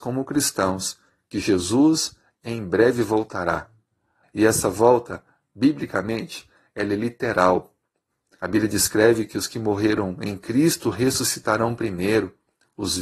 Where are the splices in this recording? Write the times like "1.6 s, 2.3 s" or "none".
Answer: 4.2 s, 6.7 s